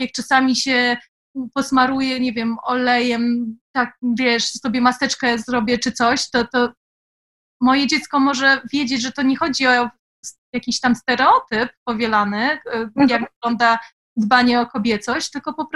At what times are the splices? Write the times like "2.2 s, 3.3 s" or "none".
none